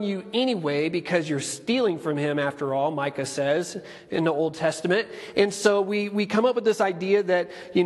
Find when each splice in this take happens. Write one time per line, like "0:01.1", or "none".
none